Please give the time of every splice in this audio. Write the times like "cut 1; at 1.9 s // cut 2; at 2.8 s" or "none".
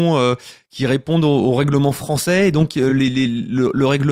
none